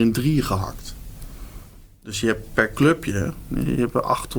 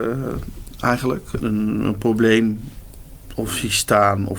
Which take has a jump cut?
second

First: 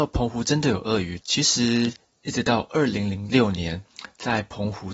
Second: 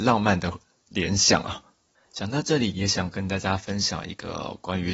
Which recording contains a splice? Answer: first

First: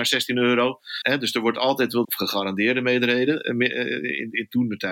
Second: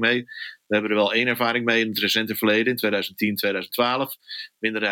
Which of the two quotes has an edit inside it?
first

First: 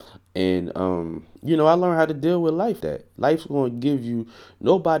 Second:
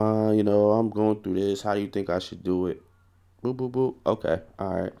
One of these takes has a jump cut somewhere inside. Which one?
first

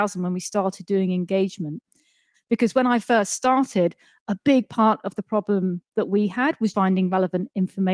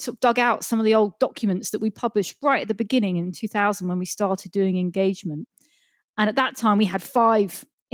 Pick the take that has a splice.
first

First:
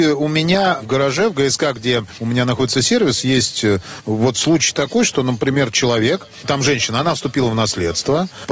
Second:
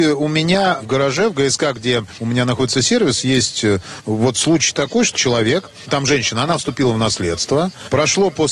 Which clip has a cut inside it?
second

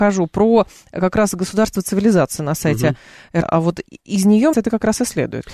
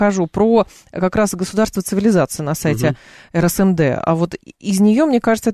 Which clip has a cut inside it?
first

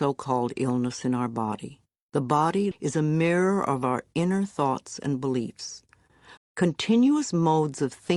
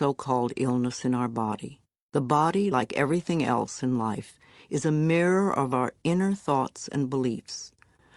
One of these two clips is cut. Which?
first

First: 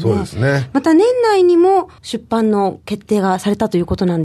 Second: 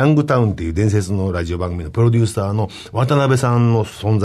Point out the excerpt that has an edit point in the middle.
first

